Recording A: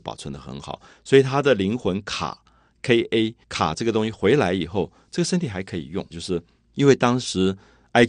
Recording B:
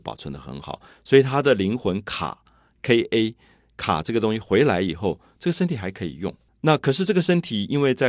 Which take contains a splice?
A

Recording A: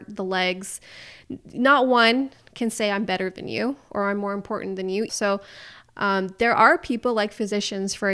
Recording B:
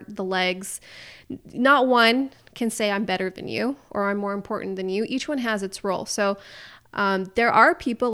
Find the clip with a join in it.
A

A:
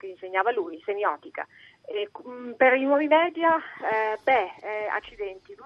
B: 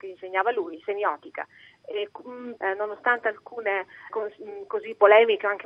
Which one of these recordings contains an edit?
B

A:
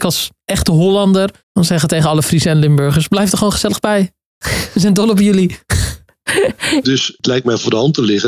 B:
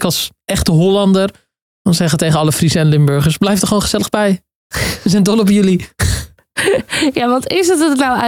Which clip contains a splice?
A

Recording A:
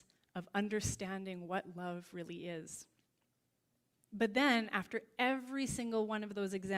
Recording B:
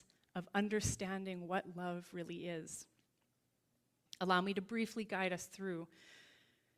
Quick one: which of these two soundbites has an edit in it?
A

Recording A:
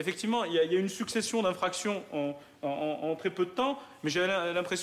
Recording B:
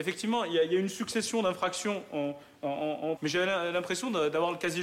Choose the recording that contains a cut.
B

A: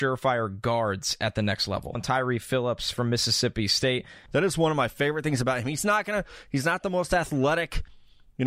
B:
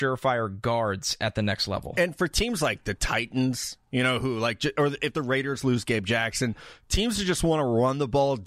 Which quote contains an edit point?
A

